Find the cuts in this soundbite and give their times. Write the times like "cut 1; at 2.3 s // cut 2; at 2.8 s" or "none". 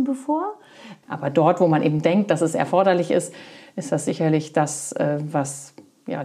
cut 1; at 1.0 s